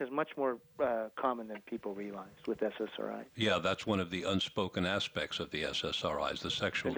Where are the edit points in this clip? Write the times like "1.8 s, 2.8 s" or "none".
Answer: none